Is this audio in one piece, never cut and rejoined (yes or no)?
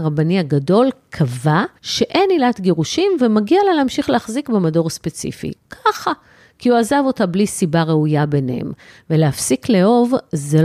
no